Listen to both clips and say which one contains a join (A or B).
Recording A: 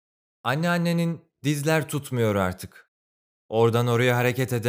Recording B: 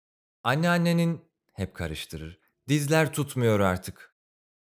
A